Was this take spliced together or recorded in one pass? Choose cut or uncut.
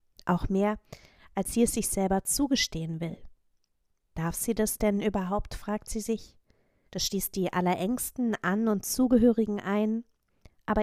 cut